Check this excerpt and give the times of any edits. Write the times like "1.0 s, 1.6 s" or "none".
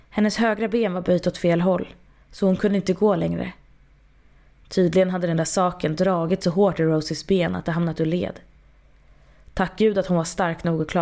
none